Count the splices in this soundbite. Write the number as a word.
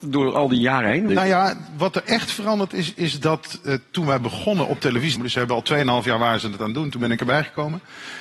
two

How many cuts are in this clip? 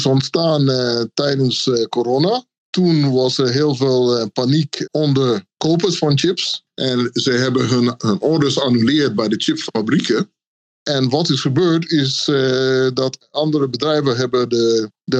zero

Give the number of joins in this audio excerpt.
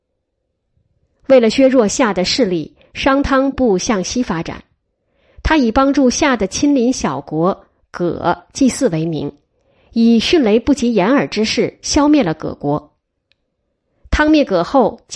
one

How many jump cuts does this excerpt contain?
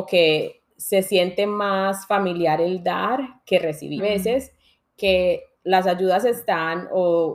two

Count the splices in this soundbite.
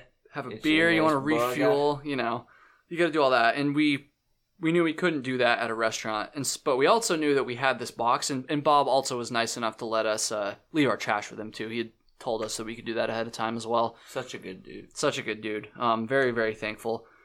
zero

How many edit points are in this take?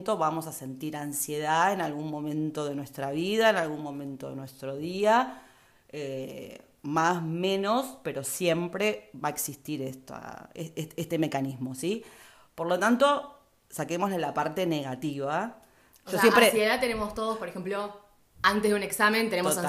zero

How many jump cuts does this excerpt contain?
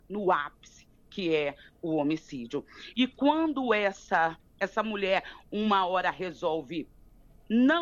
two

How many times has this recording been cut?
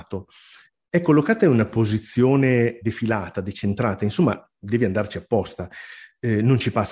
one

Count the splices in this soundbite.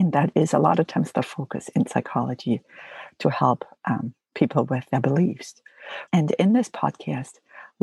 one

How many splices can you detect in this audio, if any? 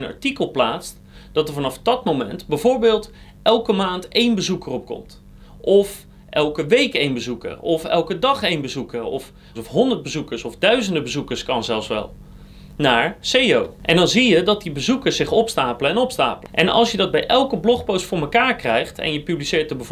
three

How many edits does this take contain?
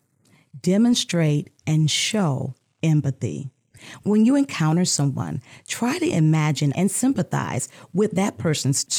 one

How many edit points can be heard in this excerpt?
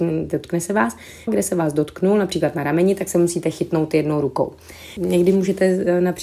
two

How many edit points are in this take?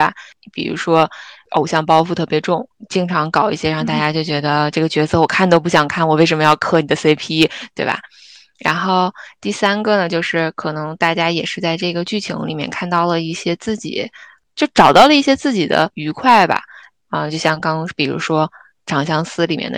one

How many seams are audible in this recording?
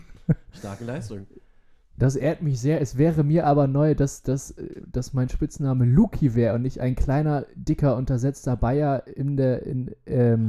zero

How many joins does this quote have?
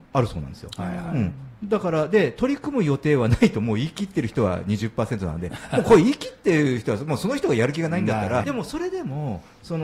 one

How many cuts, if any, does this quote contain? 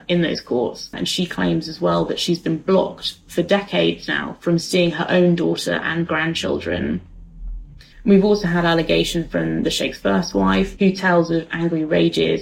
three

